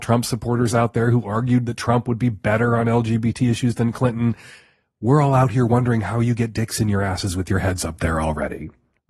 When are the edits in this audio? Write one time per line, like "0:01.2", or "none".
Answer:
none